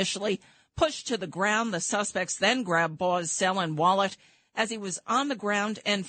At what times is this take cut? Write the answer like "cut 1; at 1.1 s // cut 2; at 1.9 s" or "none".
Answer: none